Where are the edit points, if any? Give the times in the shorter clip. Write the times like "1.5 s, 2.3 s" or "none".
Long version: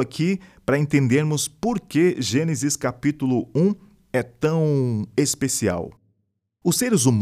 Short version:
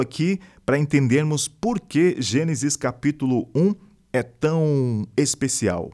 none